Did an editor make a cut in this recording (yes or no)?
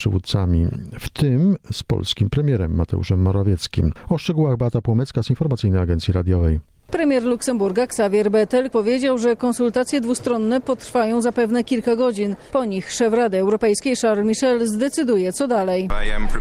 yes